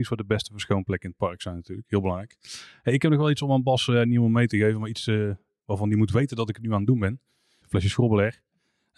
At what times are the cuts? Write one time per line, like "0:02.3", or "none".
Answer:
0:07.6